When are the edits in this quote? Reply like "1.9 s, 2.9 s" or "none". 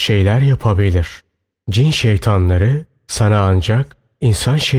none